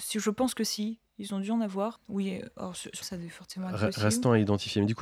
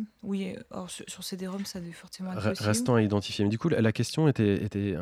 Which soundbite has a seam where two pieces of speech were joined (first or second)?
first